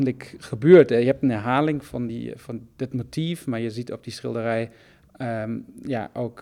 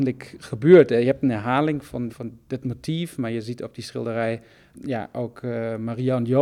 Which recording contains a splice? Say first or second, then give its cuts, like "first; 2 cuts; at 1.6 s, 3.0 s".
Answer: second; 2 cuts; at 2.1 s, 4.7 s